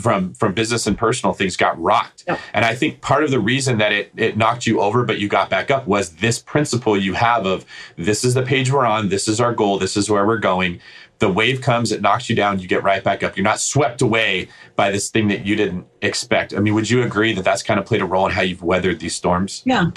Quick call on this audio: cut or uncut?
uncut